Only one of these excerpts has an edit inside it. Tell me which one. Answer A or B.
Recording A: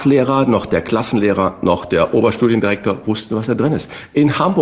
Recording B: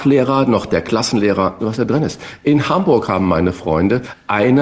B